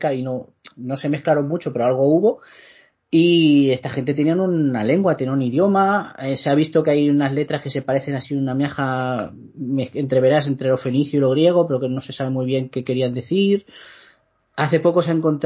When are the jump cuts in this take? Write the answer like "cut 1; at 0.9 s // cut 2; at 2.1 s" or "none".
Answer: none